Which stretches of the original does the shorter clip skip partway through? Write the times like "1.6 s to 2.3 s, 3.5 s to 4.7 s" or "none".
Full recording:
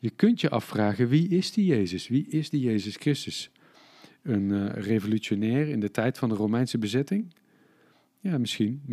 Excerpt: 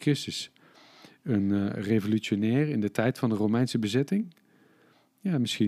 none